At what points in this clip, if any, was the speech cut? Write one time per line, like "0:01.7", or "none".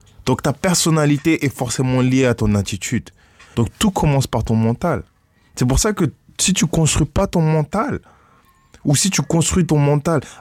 0:03.5